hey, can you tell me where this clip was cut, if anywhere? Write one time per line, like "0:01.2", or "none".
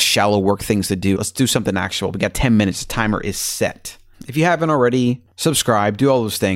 0:01.2
0:05.3